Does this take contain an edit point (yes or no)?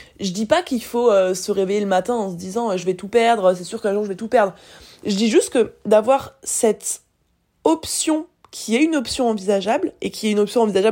no